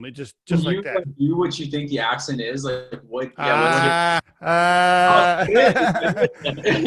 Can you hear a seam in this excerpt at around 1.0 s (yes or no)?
yes